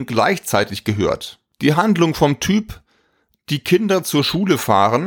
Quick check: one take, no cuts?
yes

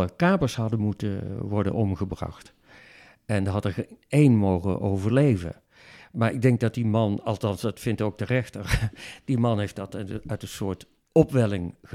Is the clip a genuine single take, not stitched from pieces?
yes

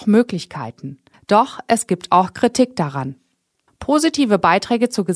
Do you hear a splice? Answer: yes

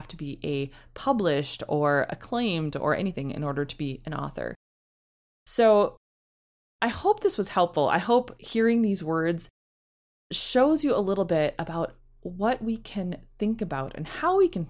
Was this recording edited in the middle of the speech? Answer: no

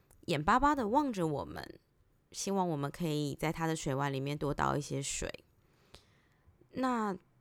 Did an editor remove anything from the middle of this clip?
no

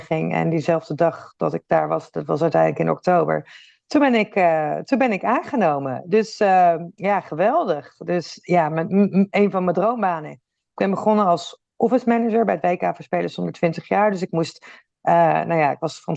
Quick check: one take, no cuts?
yes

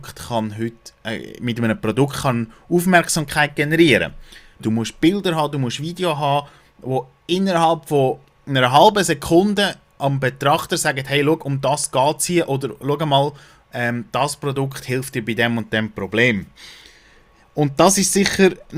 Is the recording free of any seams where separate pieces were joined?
no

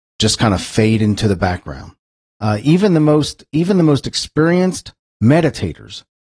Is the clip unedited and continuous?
no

